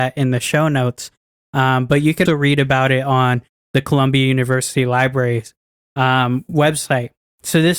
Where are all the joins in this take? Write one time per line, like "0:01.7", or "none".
0:02.3